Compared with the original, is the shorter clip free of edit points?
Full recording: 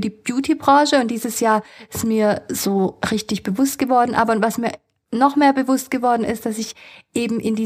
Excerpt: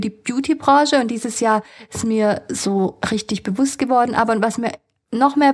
yes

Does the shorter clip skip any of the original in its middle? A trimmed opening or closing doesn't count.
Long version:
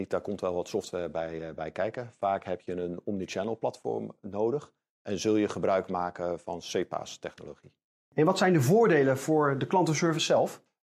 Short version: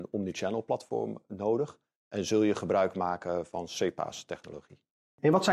no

